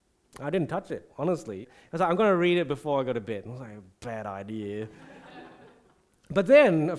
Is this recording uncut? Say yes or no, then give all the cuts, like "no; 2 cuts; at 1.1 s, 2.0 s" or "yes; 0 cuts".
no; 1 cut; at 1.6 s